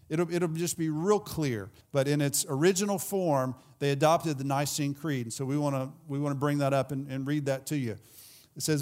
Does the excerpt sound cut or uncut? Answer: cut